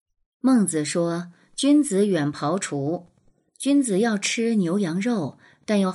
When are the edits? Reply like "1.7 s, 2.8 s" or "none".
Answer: none